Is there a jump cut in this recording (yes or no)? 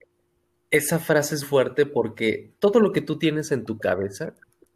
yes